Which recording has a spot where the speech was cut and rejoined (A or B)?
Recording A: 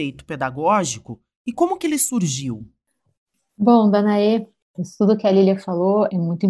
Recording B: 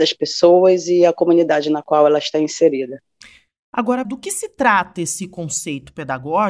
B